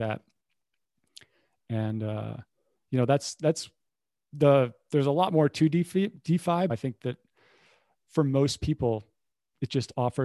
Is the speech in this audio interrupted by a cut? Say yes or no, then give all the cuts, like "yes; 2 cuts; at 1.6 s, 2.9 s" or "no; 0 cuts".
yes; 1 cut; at 6.7 s